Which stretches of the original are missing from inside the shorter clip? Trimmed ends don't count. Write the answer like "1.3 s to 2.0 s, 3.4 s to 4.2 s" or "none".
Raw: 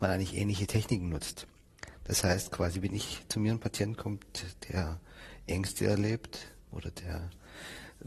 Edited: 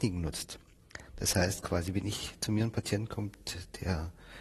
none